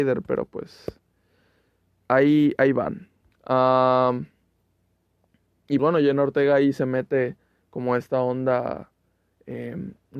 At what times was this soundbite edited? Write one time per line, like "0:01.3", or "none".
0:03.3
0:05.8

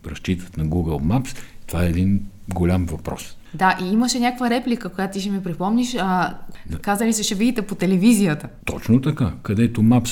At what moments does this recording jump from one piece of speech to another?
0:08.6

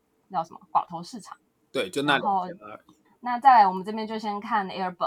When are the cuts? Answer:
0:03.0

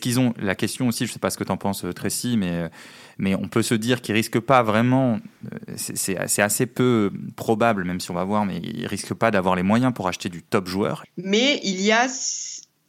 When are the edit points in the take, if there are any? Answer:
0:11.0

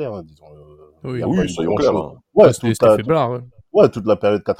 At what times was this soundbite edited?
none

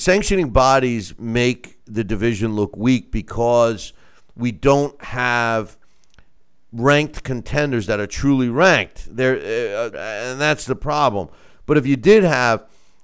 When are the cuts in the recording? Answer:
0:09.9

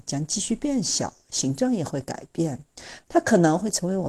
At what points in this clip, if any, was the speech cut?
none

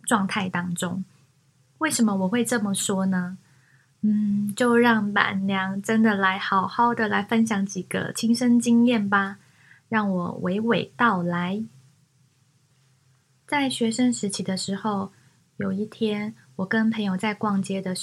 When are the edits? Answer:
none

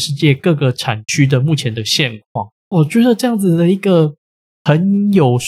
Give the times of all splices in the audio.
0:02.6

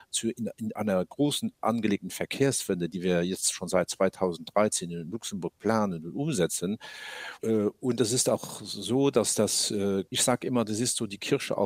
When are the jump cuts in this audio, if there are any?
0:07.4
0:10.1

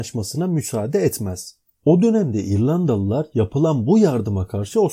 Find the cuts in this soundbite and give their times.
0:01.6

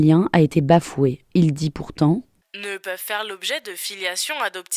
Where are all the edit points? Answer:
0:01.2

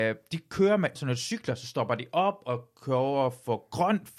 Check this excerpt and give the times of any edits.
0:01.0

